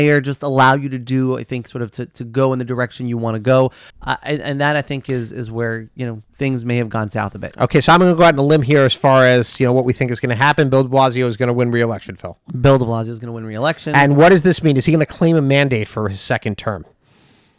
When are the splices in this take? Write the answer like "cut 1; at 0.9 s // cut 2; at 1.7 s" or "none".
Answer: cut 1; at 3.9 s